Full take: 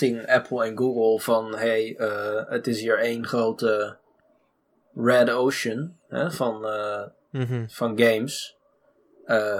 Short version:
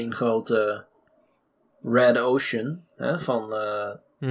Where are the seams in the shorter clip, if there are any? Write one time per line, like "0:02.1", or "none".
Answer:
none

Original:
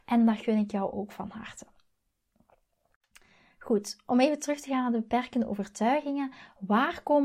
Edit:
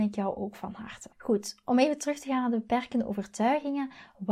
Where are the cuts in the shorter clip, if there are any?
0:01.1

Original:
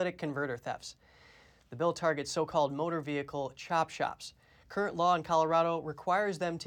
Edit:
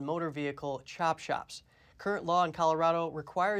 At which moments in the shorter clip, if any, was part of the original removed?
none

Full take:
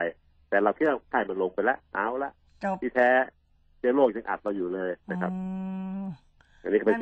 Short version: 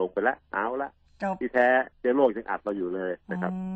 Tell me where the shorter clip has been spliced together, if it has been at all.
0:01.9

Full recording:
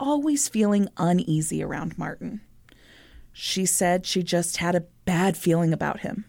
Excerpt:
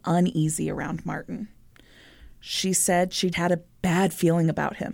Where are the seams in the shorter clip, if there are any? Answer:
0:03.3

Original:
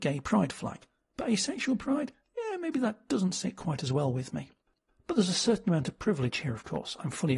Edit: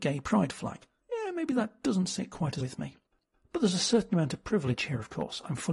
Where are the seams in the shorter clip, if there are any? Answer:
0:01.0
0:02.6

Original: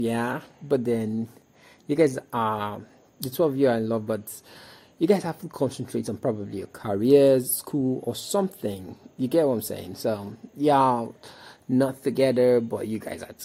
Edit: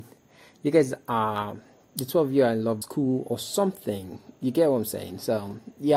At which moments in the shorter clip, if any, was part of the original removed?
0:02.8

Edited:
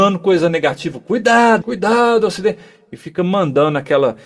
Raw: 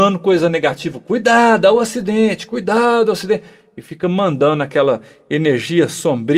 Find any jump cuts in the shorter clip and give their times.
0:01.6

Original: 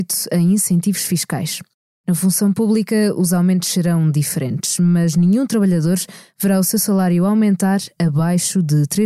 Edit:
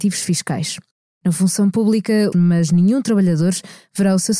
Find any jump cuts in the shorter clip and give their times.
0:02.3

